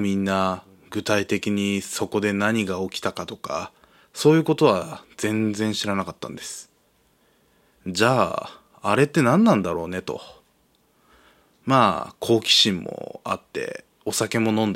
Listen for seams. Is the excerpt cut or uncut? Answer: uncut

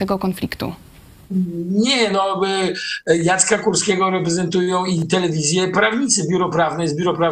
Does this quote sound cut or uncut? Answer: uncut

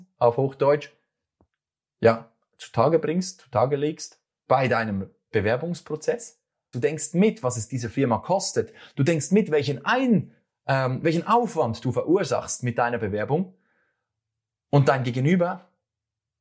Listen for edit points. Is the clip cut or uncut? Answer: cut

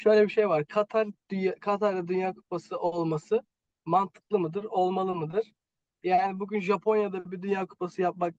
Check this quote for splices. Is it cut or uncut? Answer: uncut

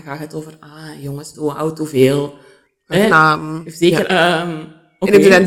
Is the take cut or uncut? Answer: cut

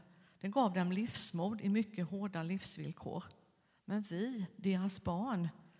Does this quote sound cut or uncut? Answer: uncut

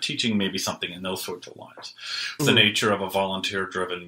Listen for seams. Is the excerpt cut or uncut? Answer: cut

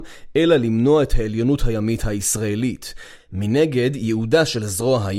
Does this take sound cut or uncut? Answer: uncut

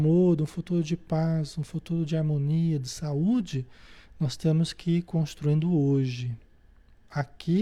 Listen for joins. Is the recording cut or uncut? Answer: uncut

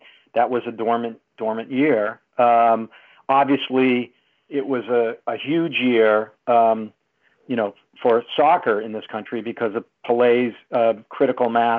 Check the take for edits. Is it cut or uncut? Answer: uncut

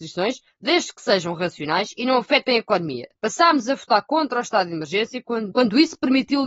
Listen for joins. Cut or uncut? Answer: cut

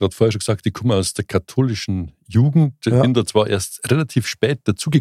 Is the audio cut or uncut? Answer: uncut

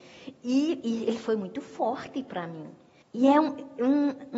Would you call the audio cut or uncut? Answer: cut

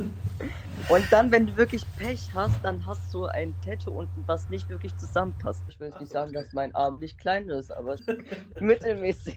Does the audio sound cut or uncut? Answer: cut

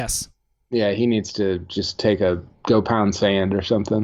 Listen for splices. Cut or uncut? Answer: uncut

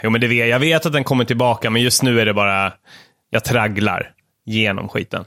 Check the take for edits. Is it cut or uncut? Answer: uncut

